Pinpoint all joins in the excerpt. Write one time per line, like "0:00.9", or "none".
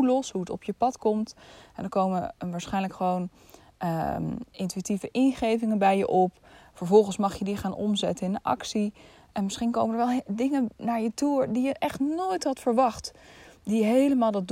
none